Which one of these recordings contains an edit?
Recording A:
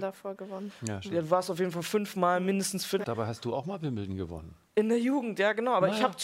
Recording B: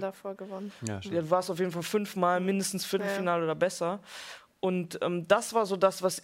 A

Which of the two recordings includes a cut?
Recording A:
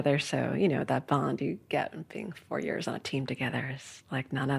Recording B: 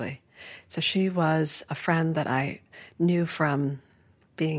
B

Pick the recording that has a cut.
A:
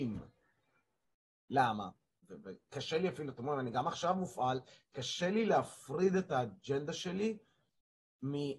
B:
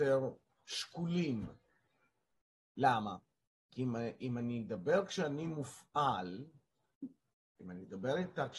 A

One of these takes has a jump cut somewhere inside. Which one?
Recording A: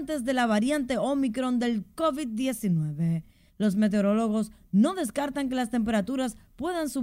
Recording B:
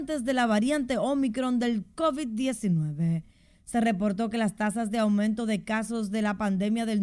A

